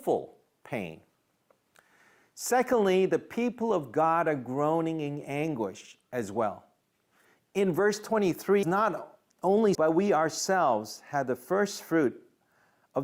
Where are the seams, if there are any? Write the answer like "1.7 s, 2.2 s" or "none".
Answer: 8.6 s, 9.7 s